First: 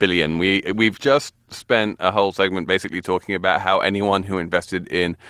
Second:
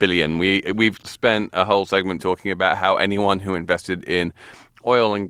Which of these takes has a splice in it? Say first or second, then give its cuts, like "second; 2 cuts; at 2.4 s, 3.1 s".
second; 2 cuts; at 1.0 s, 2.2 s